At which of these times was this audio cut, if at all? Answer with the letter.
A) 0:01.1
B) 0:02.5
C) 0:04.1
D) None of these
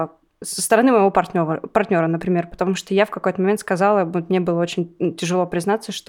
D